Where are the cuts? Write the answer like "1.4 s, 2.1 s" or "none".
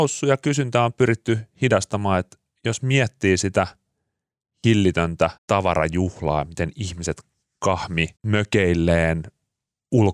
5.4 s, 8.2 s

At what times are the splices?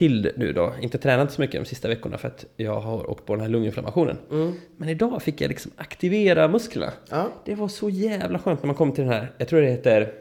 none

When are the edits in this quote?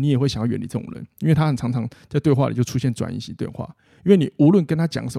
none

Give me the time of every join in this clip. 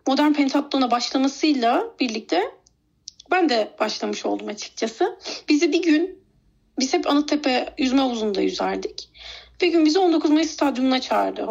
none

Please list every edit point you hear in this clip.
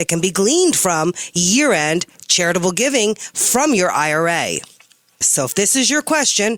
5.2 s

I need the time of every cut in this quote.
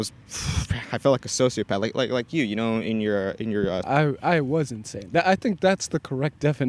3.8 s

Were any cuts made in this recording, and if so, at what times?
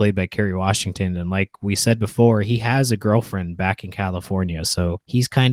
none

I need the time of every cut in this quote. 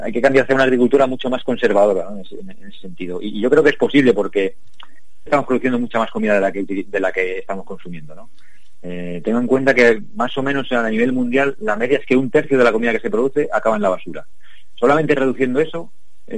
5.3 s

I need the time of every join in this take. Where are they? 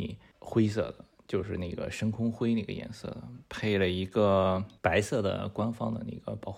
4.8 s

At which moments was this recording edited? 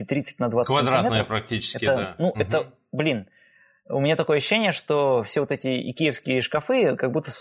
none

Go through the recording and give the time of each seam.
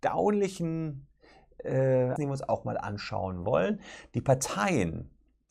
2.2 s

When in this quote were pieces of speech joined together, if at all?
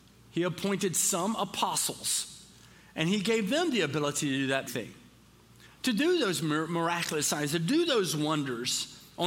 4.7 s

